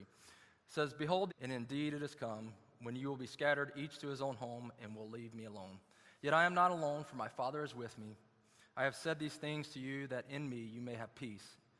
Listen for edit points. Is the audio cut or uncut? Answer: cut